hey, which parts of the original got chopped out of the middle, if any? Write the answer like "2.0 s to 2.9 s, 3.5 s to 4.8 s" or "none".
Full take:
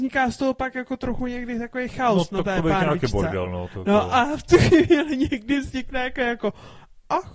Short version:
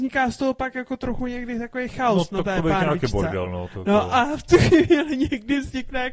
none